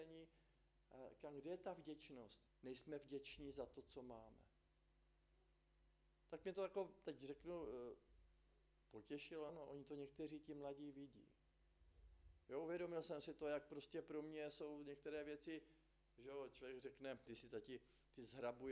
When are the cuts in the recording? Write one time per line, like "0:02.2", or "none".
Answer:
0:02.5
0:09.5
0:17.3